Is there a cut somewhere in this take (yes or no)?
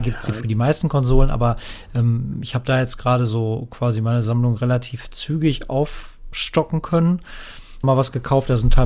yes